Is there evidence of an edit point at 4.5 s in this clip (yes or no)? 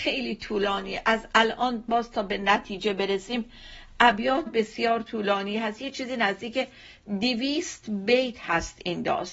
yes